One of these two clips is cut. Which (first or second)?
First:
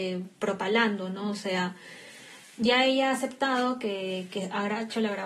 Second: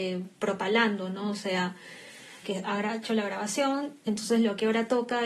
second